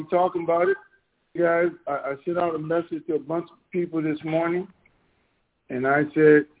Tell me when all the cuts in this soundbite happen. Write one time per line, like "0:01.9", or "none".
0:01.4